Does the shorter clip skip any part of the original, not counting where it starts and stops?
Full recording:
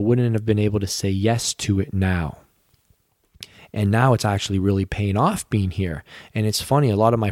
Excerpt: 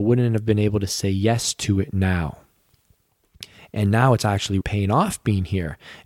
yes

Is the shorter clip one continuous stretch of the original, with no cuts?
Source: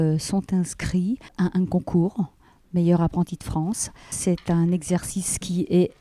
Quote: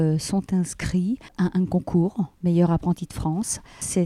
no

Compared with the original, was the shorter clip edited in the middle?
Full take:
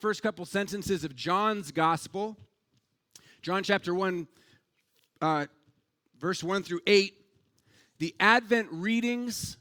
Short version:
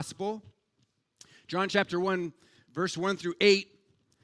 yes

